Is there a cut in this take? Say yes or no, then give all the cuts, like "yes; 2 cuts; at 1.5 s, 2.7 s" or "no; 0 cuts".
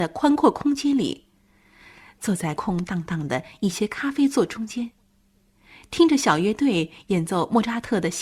yes; 1 cut; at 2.6 s